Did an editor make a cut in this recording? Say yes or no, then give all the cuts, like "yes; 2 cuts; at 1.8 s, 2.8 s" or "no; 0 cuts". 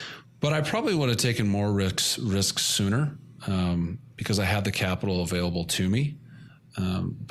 no; 0 cuts